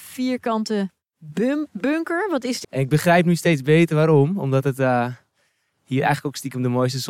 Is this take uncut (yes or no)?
no